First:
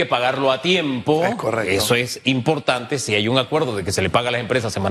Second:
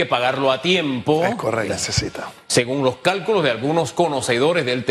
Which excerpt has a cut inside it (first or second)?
second